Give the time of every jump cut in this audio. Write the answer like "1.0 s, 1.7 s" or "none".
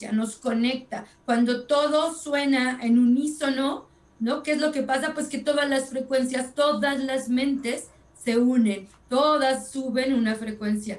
none